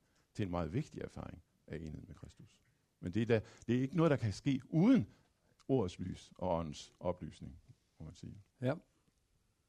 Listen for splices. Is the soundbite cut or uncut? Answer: cut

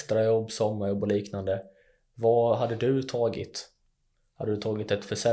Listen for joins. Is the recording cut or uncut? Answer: uncut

